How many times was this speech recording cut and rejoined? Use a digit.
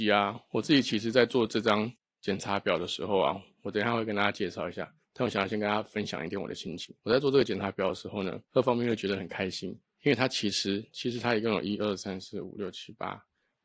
1